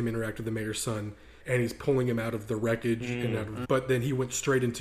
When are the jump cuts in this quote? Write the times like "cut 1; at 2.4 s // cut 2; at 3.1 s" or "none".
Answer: cut 1; at 1.4 s // cut 2; at 3.6 s

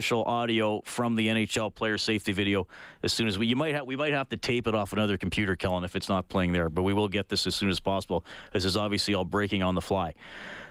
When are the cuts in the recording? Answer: none

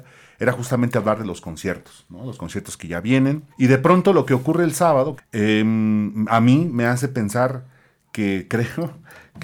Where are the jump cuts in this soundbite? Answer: cut 1; at 3.5 s // cut 2; at 5.2 s

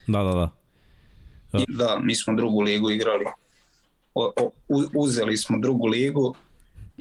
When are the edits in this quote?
cut 1; at 1.6 s

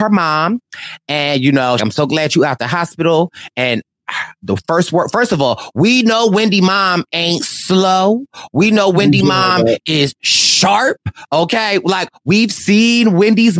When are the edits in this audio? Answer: cut 1; at 1.8 s

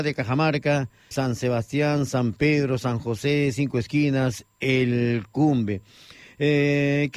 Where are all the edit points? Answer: cut 1; at 1.1 s

